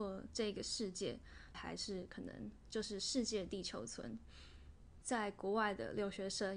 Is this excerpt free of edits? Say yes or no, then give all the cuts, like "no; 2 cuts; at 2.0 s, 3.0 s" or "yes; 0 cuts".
no; 2 cuts; at 1.5 s, 5.0 s